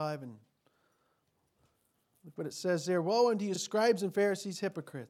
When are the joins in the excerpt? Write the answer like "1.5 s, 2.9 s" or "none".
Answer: none